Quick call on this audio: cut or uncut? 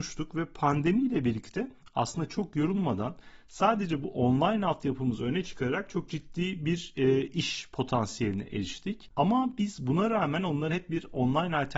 cut